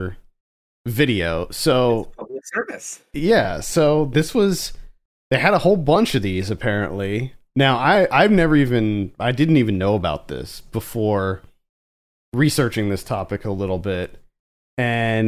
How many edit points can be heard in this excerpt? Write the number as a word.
zero